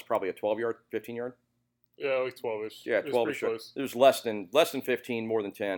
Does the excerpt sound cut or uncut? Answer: uncut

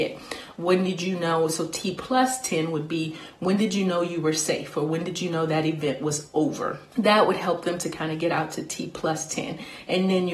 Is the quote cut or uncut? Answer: uncut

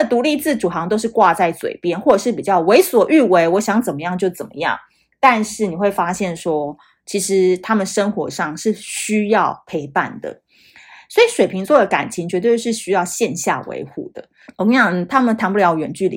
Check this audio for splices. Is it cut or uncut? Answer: cut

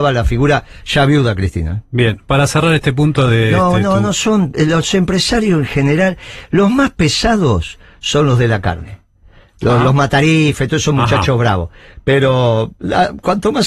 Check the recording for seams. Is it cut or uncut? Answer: uncut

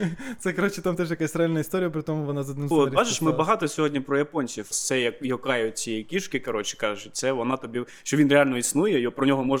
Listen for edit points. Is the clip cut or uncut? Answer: cut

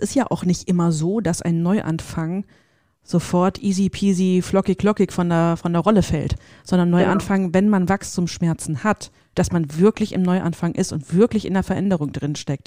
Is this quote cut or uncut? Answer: cut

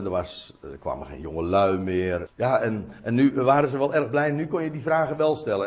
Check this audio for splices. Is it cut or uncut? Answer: cut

